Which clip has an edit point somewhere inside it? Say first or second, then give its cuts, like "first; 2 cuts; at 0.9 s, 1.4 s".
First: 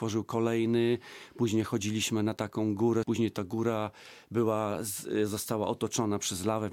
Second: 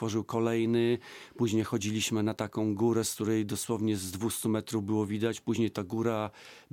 first; 1 cut; at 3.0 s